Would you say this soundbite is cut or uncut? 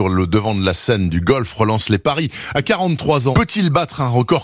cut